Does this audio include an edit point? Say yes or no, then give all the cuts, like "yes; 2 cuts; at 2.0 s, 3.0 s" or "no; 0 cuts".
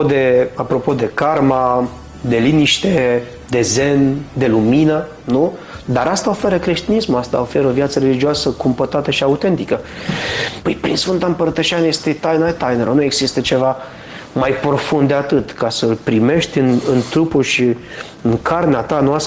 yes; 2 cuts; at 5.8 s, 10.6 s